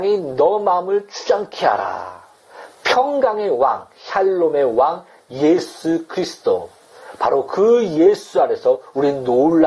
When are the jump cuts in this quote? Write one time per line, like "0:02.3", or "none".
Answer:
none